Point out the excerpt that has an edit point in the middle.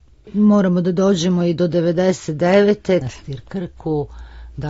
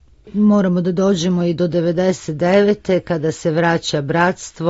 first; 1 cut; at 3.0 s

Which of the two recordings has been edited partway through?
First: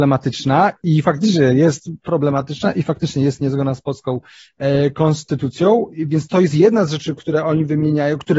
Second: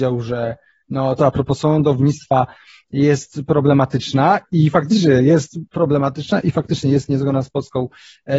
second; 1 cut; at 1.2 s

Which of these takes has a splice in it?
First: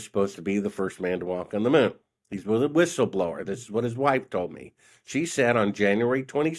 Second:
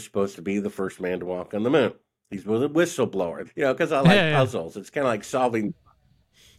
second; 1 cut; at 3.5 s

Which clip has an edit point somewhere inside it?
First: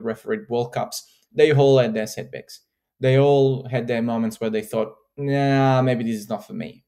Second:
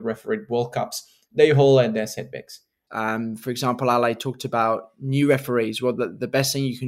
second; 1 cut; at 2.9 s

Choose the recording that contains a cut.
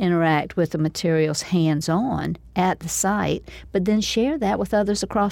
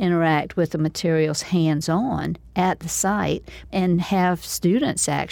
second; 1 cut; at 3.7 s

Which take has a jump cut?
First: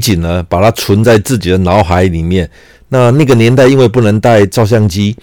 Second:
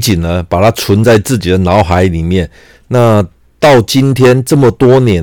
first; 1 cut; at 2.8 s

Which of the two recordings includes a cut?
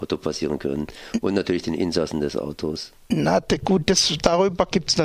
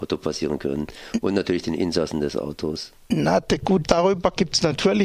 second; 1 cut; at 3.8 s

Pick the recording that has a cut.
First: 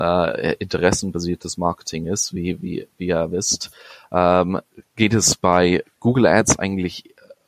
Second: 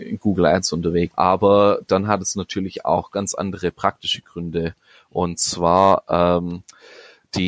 second; 1 cut; at 1.1 s

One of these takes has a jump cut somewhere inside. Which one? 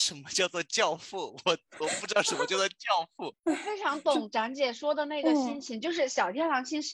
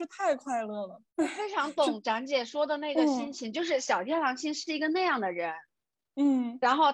second; 1 cut; at 1.1 s

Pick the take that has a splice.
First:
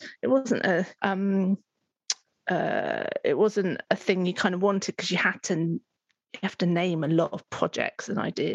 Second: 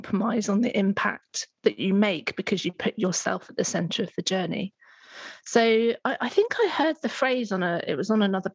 first; 1 cut; at 1.0 s

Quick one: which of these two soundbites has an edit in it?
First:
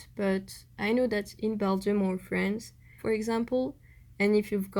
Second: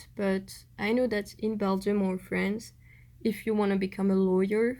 first; 1 cut; at 3.0 s

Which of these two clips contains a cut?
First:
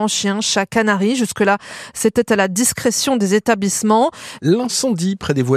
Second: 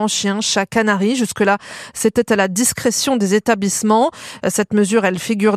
first; 1 cut; at 4.4 s

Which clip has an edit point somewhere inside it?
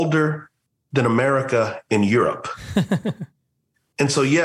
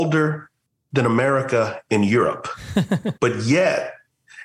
second; 1 cut; at 3.2 s

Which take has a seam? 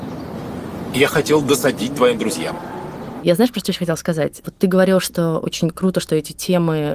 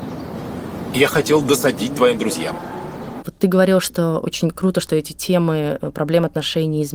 second; 1 cut; at 3.2 s

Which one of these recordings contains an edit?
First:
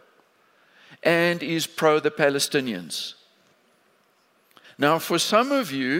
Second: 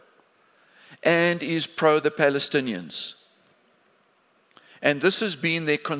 first; 1 cut; at 4.6 s

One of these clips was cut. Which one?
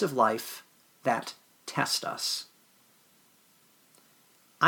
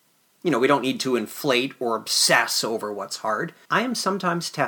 second; 1 cut; at 3.7 s

